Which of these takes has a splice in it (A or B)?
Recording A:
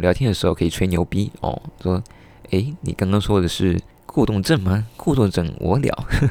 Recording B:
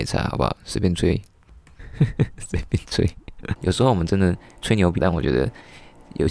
B